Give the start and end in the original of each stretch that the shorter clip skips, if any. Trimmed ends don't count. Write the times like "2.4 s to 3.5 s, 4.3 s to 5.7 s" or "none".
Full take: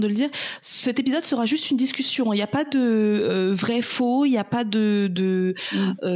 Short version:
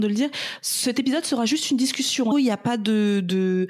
2.3 s to 4.2 s